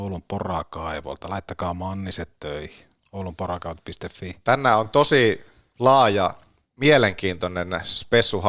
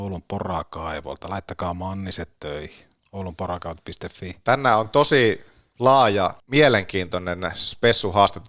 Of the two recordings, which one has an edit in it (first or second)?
second